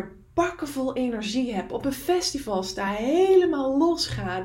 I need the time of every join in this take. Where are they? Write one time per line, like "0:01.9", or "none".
none